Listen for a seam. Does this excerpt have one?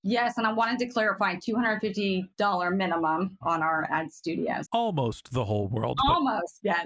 yes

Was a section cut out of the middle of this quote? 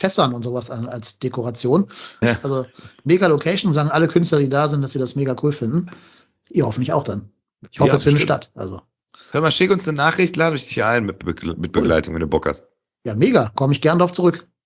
yes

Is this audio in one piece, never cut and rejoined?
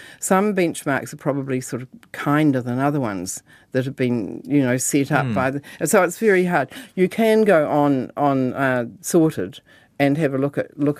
yes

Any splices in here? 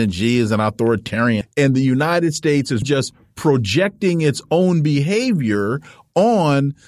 yes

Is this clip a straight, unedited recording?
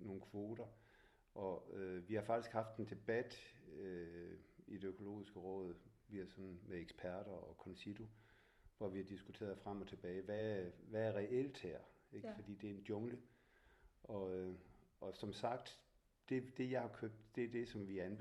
yes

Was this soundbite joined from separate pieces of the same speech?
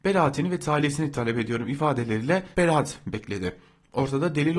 yes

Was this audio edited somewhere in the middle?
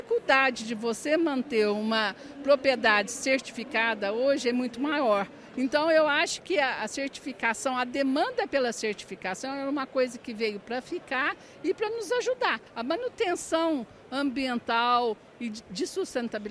yes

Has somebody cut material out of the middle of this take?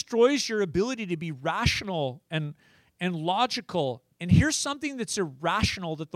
yes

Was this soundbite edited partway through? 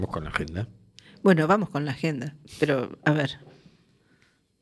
no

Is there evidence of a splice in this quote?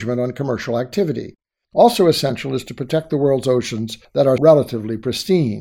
yes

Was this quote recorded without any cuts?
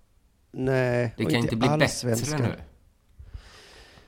yes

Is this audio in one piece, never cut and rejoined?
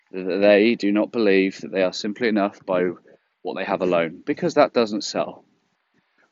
yes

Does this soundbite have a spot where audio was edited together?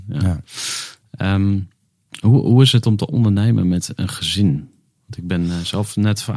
no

